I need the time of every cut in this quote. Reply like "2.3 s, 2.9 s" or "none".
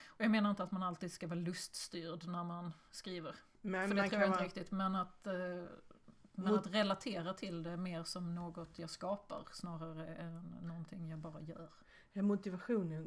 none